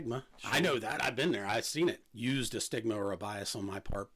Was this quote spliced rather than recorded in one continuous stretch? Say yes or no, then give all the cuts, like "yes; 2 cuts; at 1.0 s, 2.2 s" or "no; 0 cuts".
yes; 1 cut; at 2.0 s